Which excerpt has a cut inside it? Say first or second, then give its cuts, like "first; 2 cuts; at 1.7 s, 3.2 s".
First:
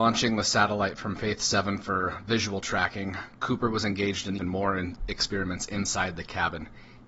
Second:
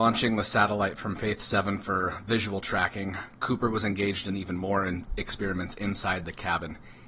first; 1 cut; at 4.4 s